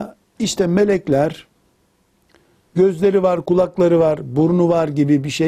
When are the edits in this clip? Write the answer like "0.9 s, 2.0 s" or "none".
none